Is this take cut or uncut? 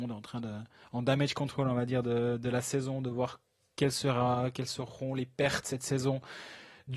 uncut